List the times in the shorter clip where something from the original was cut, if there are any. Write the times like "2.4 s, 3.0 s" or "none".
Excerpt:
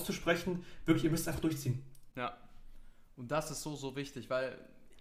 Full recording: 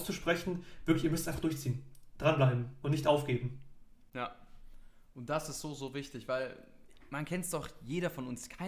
2.1 s